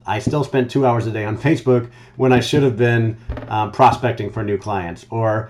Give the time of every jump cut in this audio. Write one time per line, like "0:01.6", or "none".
none